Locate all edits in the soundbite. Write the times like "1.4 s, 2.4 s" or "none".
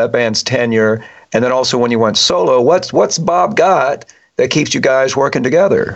none